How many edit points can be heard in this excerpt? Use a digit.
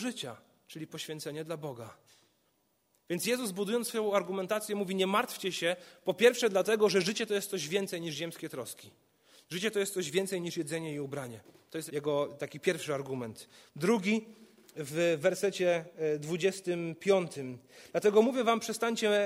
1